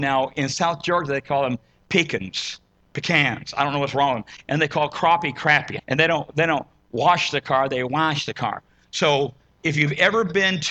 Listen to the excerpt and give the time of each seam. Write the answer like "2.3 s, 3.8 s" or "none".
5.8 s